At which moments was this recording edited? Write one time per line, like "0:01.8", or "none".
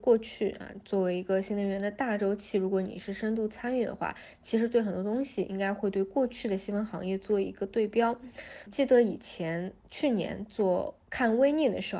0:08.7

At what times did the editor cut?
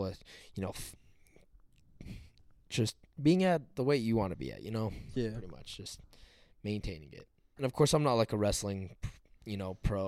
0:07.6

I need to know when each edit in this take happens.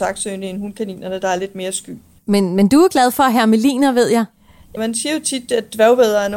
0:02.2
0:04.8

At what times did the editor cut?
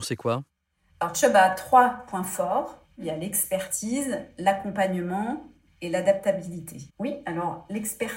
0:06.9

